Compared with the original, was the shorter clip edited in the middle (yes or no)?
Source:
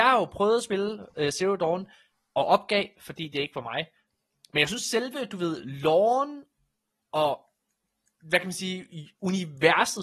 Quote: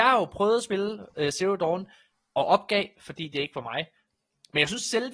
no